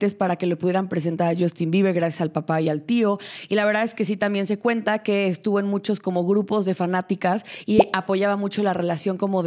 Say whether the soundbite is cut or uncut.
uncut